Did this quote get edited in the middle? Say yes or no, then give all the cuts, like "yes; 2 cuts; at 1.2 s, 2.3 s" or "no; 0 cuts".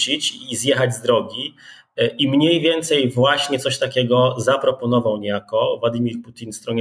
no; 0 cuts